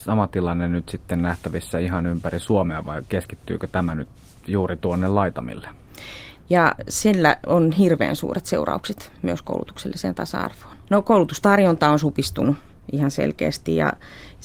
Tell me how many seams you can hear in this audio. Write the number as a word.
two